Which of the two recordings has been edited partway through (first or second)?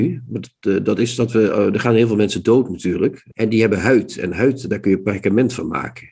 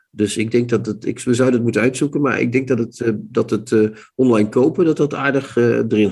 first